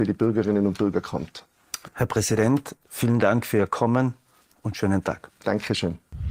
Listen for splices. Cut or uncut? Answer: uncut